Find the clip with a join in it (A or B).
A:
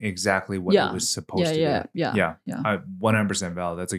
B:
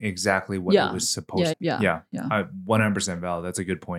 B